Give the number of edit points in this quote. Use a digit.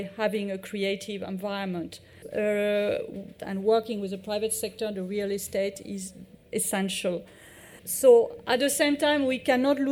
3